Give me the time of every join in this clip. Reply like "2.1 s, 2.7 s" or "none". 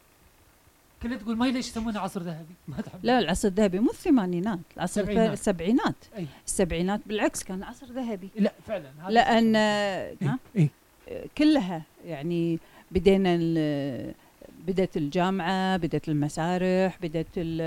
10.2 s